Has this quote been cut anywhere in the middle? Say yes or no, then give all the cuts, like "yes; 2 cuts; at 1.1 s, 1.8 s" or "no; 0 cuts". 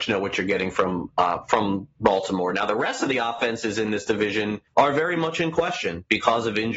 yes; 1 cut; at 4.7 s